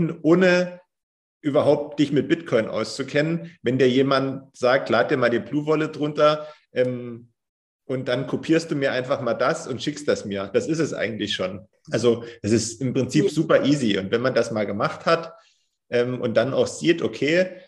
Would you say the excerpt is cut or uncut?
cut